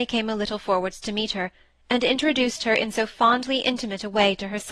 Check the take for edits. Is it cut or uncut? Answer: uncut